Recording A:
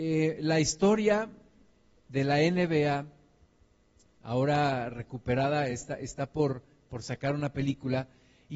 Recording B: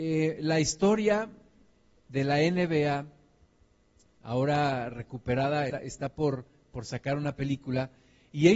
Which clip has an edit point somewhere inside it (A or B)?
B